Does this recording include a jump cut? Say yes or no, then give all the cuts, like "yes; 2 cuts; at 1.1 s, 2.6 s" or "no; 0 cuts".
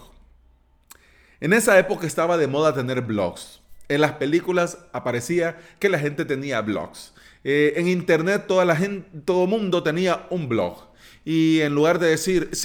no; 0 cuts